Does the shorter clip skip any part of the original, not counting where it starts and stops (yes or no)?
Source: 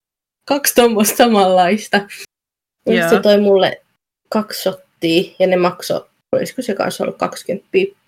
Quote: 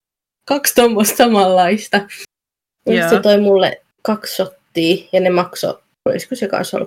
yes